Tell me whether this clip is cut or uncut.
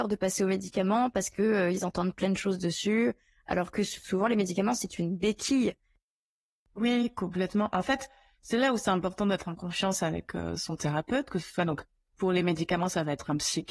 uncut